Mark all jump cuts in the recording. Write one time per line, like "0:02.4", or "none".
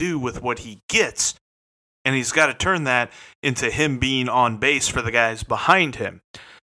none